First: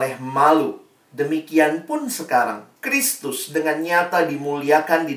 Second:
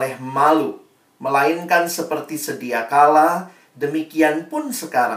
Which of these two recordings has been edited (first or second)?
first